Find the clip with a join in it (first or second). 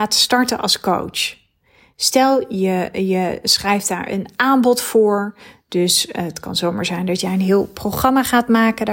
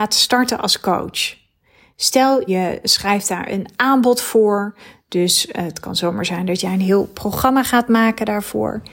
second